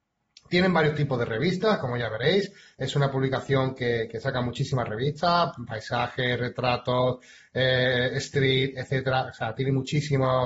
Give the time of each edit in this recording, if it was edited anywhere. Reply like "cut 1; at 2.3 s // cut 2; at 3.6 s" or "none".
none